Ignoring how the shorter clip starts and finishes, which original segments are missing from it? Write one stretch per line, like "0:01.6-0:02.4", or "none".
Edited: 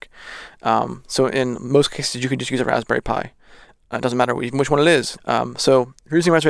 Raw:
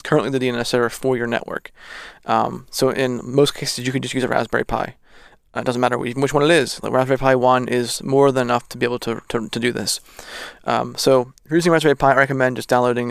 0:06.8-0:10.6